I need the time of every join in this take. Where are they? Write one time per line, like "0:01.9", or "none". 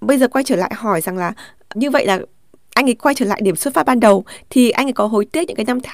0:01.7